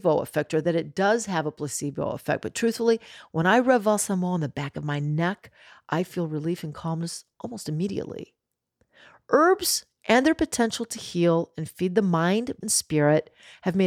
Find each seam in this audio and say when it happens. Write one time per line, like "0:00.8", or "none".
0:12.6